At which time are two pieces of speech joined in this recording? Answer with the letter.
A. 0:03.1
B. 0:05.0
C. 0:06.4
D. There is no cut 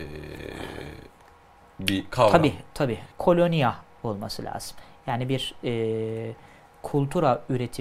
A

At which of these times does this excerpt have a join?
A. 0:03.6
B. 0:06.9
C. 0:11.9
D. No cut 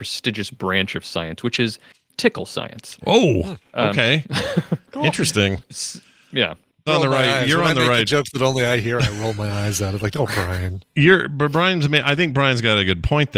B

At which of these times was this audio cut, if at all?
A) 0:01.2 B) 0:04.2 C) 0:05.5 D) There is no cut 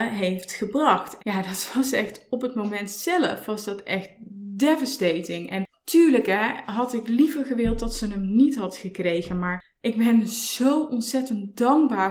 A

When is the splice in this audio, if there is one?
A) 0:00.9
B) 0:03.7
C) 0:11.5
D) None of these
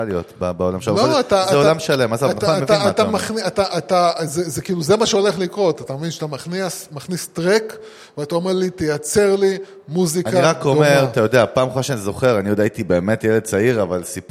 B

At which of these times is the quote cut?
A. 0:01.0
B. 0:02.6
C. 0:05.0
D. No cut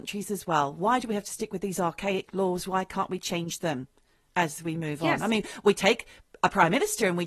D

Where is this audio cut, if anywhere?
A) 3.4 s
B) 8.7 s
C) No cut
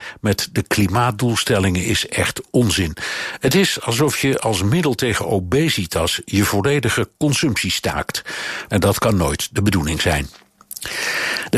B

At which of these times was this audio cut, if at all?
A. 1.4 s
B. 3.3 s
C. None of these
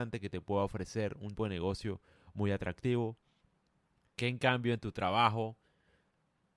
A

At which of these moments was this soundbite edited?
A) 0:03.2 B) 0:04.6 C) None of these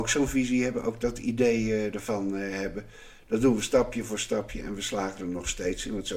C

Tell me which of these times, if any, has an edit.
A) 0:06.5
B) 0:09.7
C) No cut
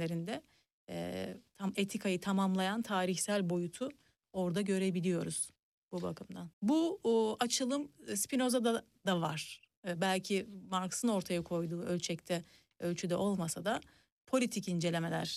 A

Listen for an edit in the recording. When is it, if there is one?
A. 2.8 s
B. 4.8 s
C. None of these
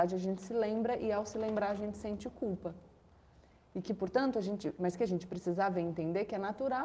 C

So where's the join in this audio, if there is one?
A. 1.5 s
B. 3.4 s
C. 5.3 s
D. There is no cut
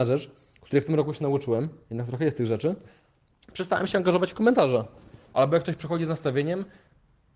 C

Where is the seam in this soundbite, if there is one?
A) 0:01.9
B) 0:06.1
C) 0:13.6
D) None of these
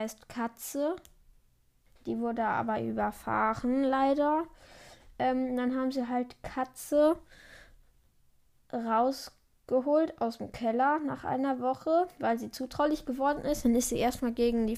A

